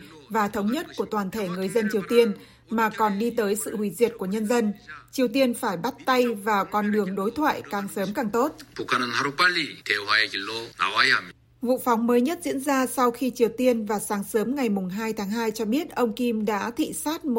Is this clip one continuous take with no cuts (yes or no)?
yes